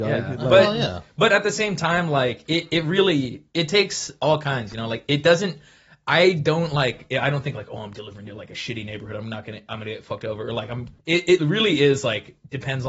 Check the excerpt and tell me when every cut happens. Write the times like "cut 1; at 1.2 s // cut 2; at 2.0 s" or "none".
cut 1; at 11.0 s